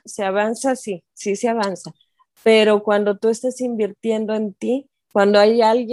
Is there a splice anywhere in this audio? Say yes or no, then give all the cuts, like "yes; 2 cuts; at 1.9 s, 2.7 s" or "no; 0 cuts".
no; 0 cuts